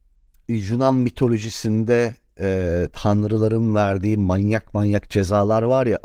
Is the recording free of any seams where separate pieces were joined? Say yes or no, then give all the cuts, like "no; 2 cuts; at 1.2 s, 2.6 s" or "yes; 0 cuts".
yes; 0 cuts